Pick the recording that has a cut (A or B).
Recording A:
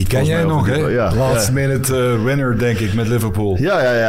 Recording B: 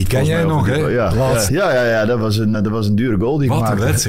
B